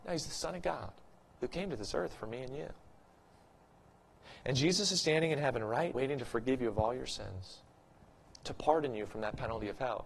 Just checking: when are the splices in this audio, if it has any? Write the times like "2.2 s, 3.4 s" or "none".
5.9 s